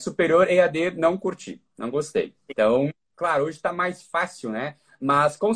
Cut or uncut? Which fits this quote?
cut